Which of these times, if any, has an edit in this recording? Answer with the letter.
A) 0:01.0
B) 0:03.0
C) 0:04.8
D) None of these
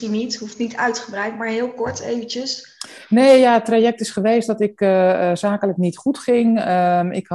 D